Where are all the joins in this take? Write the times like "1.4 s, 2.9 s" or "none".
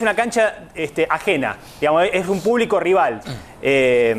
3.2 s